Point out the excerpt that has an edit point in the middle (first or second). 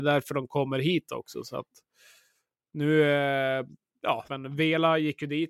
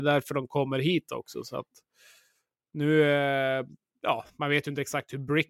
first